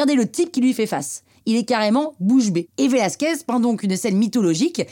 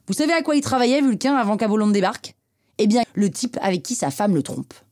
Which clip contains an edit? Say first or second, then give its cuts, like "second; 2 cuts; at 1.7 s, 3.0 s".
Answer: second; 1 cut; at 3.0 s